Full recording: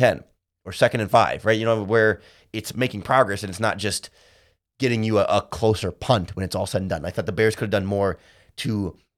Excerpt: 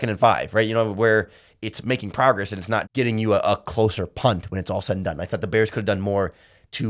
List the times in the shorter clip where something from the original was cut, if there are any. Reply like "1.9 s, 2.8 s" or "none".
2.8 s